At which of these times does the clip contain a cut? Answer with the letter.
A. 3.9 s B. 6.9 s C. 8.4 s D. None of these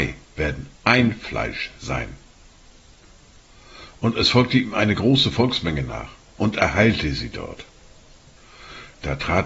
A